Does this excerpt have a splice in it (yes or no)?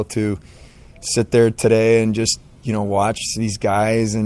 no